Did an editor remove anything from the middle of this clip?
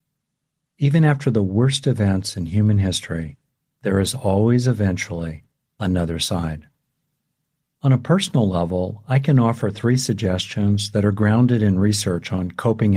yes; 1 cut; at 7.8 s

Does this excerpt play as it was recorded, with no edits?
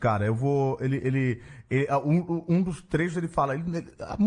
yes; 0 cuts

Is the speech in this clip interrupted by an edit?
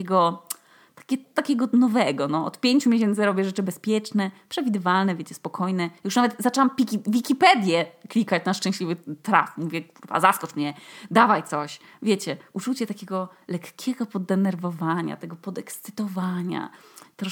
no; 0 cuts

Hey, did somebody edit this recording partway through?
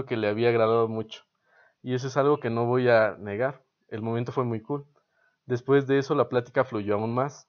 no; 0 cuts

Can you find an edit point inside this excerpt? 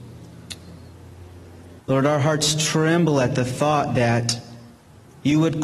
yes; 1 cut; at 1.8 s

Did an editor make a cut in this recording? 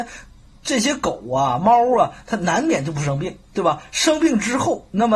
no; 0 cuts

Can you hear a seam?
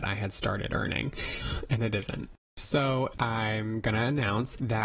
yes; 2 cuts; at 1.4 s, 3.1 s

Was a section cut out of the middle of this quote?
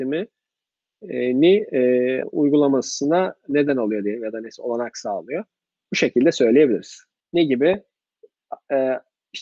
yes; 2 cuts; at 2.2 s, 7.2 s

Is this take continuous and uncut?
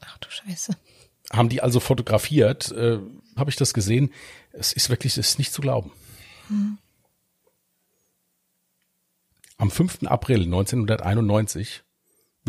no; 1 cut; at 3.4 s

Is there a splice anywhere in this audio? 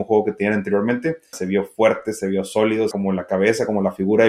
yes; 2 cuts; at 1.3 s, 2.9 s

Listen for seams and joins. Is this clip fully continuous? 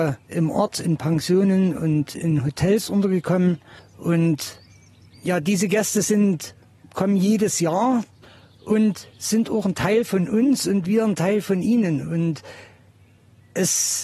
no; 1 cut; at 3.8 s

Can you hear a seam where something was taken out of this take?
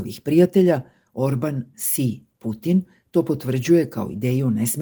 yes; 1 cut; at 1.7 s

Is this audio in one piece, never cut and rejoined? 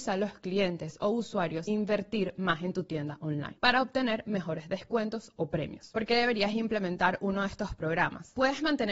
yes; 0 cuts

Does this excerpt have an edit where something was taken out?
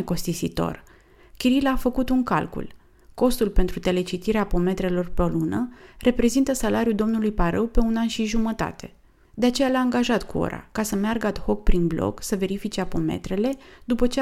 no; 0 cuts

